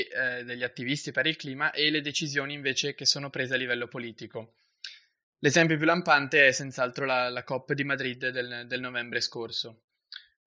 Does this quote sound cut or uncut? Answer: uncut